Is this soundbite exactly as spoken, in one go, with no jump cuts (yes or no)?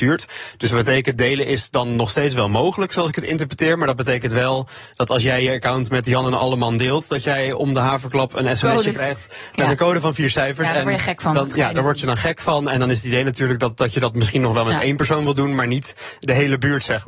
yes